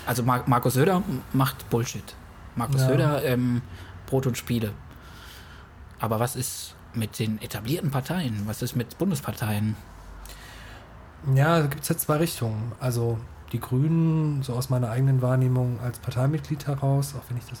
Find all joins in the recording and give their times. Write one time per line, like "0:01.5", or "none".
0:12.8